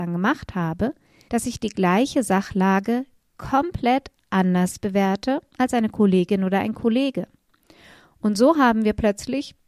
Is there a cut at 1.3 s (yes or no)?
yes